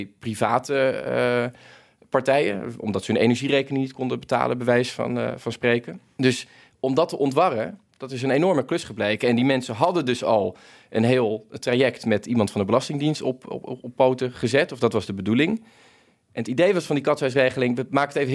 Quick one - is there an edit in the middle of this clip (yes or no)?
no